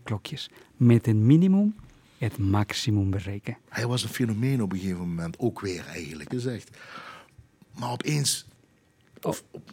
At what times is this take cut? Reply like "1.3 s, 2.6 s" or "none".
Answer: 6.3 s